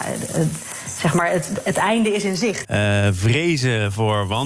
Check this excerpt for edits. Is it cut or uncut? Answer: cut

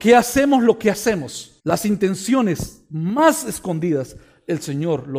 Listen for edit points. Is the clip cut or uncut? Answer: cut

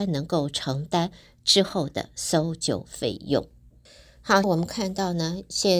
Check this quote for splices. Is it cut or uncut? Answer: cut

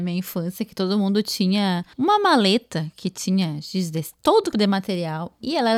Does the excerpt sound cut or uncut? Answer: cut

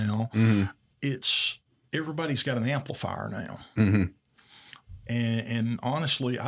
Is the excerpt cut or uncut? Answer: uncut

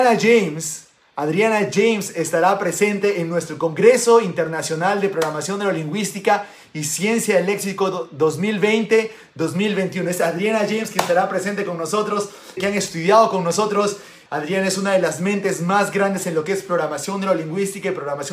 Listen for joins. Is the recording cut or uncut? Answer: cut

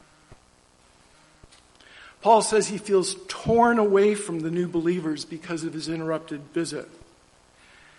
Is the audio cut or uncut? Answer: cut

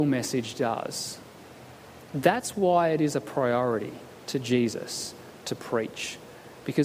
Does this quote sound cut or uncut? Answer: uncut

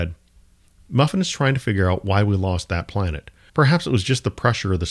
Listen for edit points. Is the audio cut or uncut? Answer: cut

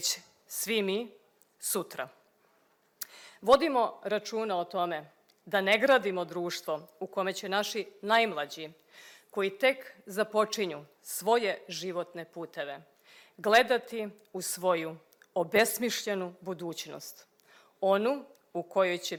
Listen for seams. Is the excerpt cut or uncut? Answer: uncut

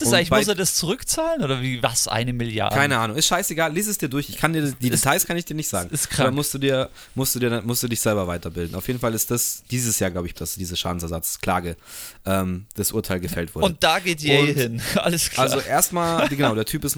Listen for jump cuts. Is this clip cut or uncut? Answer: cut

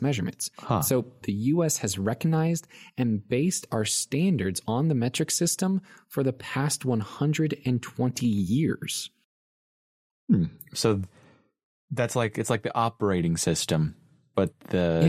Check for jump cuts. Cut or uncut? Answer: cut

